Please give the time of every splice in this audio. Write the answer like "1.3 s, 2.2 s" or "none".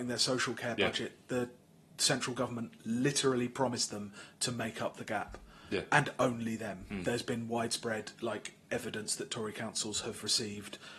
none